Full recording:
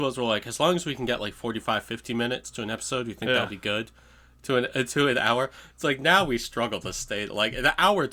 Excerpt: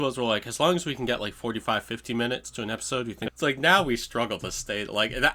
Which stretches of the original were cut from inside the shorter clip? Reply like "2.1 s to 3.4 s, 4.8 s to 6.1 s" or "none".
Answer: 3.3 s to 5.7 s